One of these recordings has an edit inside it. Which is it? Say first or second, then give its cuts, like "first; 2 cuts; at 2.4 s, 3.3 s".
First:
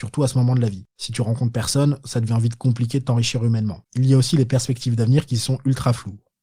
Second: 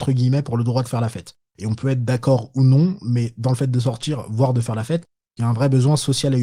first; 2 cuts; at 0.9 s, 3.9 s